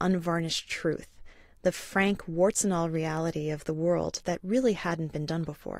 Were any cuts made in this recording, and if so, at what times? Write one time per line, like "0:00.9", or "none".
none